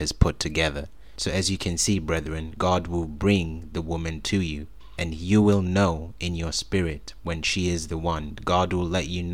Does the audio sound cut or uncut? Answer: cut